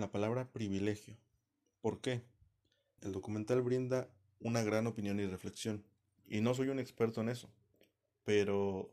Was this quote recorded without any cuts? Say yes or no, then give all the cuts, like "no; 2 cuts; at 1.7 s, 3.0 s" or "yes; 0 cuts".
no; 2 cuts; at 3.0 s, 6.2 s